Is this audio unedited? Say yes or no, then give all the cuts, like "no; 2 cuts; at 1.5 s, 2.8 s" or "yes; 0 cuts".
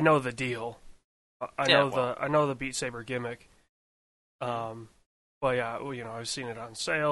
yes; 0 cuts